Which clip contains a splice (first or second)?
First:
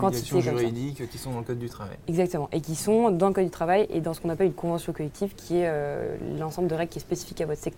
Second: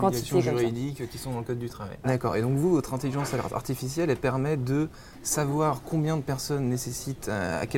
second